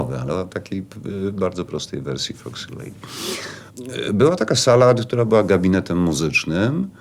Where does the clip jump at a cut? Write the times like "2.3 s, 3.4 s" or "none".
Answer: none